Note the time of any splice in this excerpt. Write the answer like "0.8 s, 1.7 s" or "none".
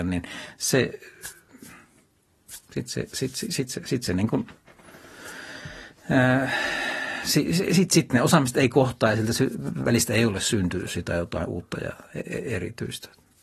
none